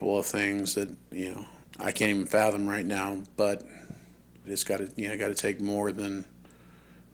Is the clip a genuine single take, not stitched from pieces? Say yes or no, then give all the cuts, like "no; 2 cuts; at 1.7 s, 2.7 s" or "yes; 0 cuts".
no; 1 cut; at 4.4 s